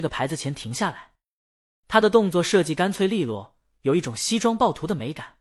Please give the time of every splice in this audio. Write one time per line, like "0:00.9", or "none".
0:01.7